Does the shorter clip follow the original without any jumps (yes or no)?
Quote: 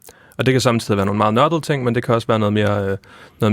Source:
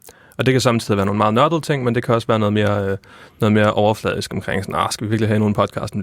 yes